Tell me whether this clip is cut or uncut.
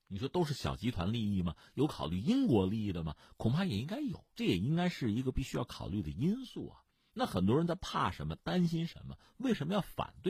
uncut